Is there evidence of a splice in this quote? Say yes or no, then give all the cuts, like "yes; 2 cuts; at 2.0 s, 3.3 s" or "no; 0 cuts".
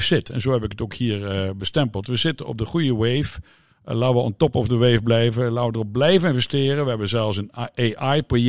no; 0 cuts